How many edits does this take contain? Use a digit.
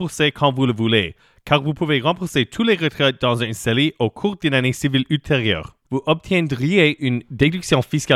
1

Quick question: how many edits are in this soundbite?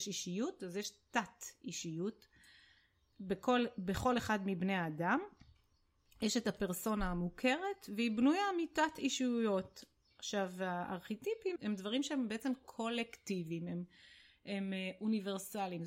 1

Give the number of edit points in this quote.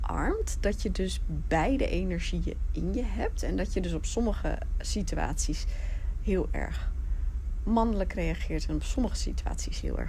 0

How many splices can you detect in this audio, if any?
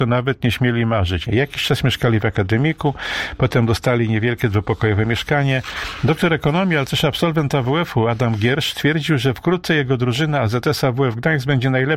1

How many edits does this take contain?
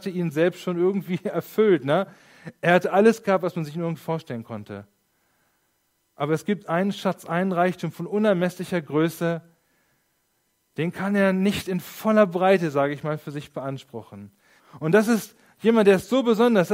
1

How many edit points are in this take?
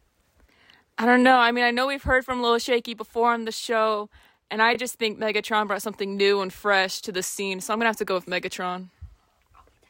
0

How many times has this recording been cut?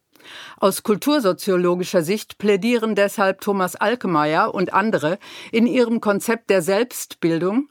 0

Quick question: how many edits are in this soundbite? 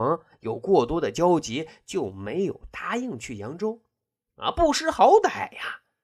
1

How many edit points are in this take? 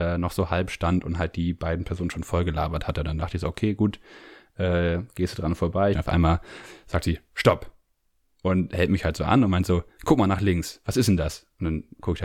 1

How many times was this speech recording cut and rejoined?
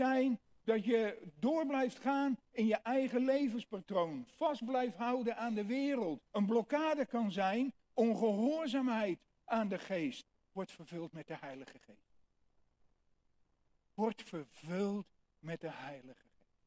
2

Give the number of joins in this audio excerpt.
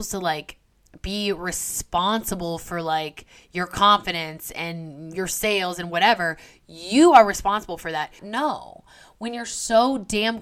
1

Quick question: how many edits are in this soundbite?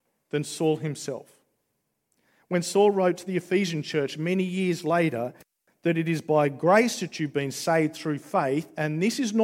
0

